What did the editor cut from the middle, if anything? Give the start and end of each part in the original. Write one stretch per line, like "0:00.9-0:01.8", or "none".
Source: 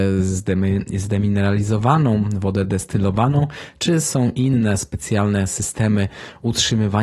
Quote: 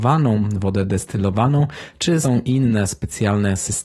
0:04.0-0:04.1